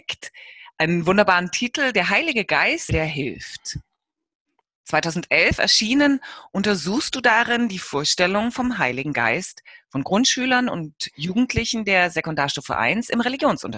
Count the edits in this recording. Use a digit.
1